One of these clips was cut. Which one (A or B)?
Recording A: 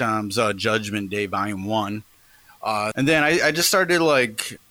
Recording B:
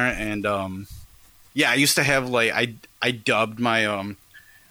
A